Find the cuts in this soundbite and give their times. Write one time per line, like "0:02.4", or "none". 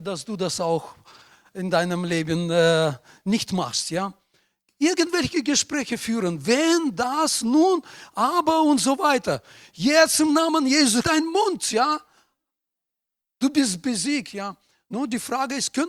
0:11.0